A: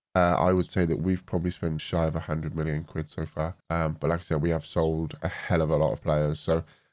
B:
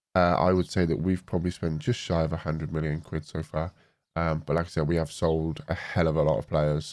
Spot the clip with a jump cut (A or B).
A